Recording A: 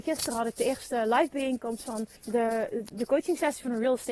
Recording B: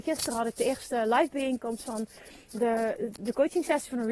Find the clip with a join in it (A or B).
A